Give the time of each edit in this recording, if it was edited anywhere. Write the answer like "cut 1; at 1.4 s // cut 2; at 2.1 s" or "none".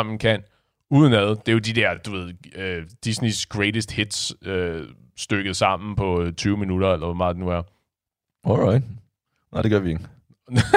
none